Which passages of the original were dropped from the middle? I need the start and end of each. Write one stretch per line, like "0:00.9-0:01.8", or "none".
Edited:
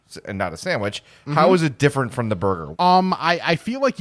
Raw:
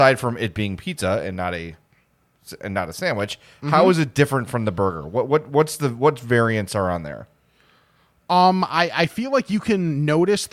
0:05.1-0:08.2